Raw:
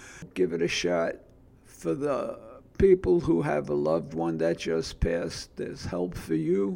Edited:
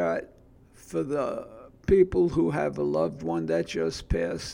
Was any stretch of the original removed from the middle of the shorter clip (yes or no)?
no